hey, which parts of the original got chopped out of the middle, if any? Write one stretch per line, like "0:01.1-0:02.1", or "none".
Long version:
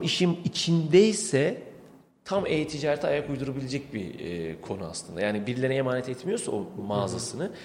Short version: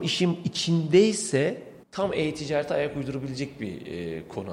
0:01.8-0:02.2